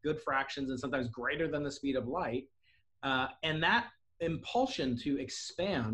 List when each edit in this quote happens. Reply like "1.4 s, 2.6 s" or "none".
none